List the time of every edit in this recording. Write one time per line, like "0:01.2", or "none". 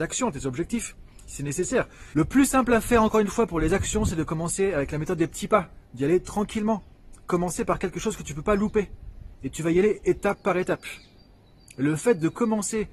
0:02.1